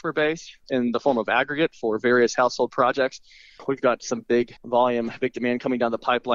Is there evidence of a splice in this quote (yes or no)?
yes